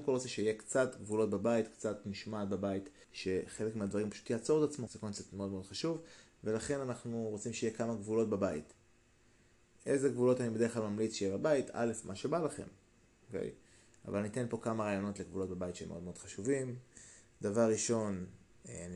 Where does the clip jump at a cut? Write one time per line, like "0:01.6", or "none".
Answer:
0:03.0
0:04.9